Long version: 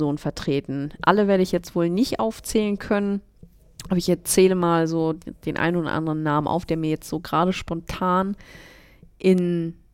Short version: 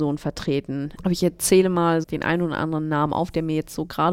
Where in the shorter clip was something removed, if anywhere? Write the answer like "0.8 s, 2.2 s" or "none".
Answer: 1.0 s, 2.0 s